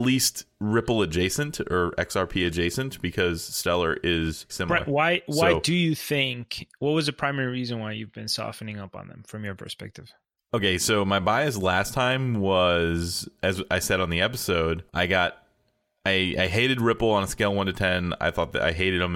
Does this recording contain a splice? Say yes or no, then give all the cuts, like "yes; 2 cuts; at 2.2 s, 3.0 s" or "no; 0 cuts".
yes; 3 cuts; at 4.5 s, 10.4 s, 14.9 s